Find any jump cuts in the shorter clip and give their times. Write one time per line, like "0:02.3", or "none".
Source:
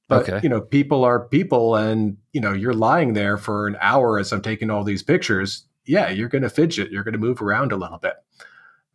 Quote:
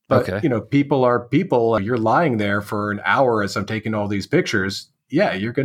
0:01.8